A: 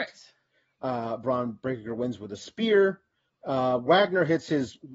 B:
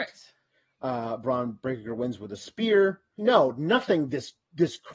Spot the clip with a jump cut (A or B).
B